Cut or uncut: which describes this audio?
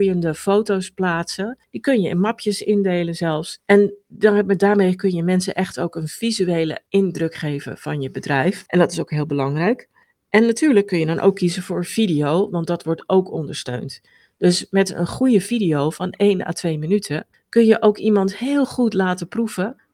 uncut